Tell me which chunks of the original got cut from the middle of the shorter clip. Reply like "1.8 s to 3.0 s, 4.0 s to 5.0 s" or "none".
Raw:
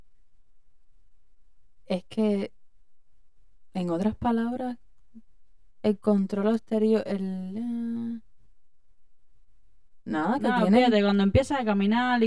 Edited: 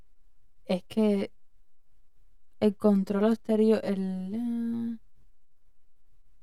3.7 s to 5.7 s